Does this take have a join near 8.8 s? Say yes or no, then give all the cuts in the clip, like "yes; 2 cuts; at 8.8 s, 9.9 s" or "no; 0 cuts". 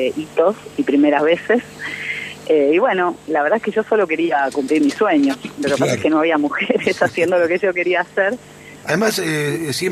yes; 1 cut; at 8.8 s